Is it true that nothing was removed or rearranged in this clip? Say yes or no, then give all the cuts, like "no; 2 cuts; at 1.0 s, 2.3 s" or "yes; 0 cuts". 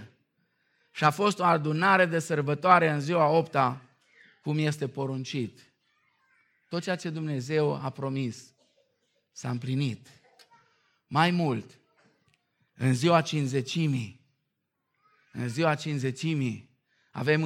yes; 0 cuts